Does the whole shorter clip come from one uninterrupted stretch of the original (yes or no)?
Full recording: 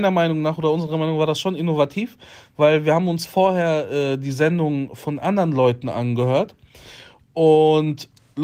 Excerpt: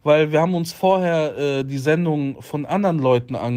yes